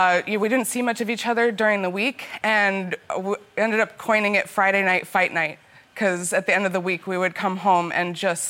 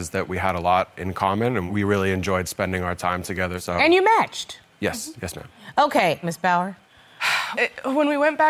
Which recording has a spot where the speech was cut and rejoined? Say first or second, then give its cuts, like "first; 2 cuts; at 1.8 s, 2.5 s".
second; 2 cuts; at 6.2 s, 7.5 s